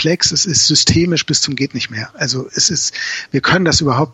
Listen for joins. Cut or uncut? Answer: uncut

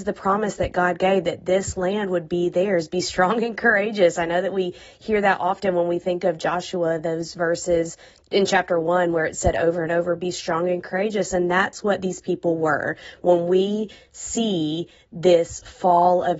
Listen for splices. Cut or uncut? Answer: uncut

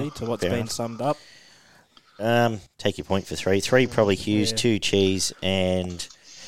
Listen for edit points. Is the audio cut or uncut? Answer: cut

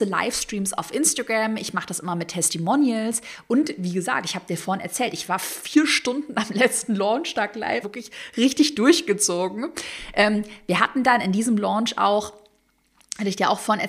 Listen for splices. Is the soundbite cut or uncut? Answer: cut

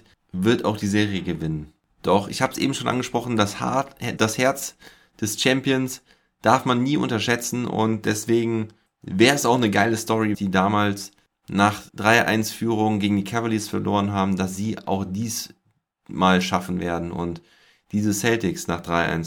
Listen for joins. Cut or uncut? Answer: cut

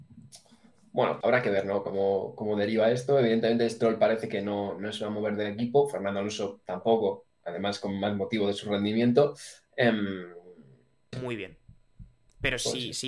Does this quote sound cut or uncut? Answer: cut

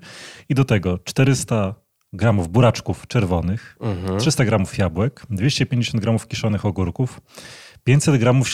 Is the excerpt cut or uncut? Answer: uncut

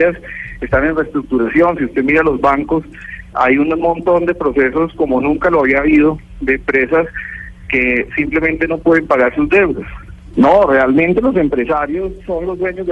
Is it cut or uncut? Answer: cut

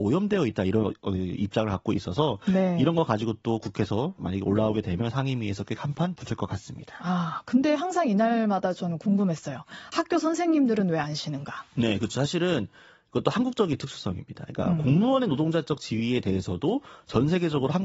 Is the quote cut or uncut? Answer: uncut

